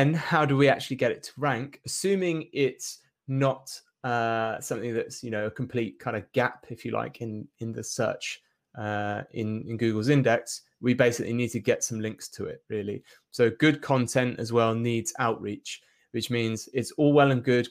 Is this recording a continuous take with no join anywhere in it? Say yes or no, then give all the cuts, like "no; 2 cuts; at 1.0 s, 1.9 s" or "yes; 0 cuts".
yes; 0 cuts